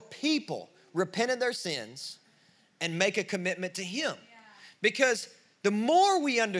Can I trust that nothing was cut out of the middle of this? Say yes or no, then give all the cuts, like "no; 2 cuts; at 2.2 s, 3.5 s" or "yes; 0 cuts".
yes; 0 cuts